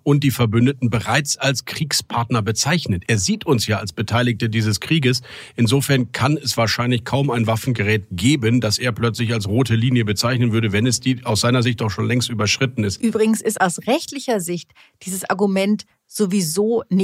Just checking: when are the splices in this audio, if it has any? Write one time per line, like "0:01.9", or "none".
none